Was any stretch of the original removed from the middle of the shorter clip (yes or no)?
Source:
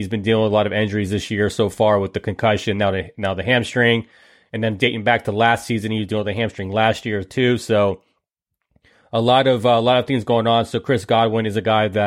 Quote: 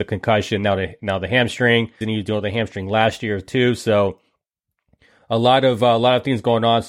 yes